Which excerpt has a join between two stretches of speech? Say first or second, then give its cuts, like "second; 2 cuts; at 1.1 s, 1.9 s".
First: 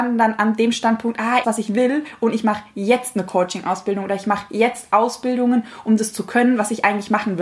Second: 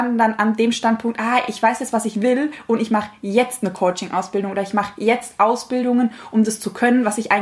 first; 1 cut; at 1.4 s